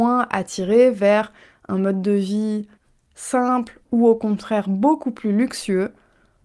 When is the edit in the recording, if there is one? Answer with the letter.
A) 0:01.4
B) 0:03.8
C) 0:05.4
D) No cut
B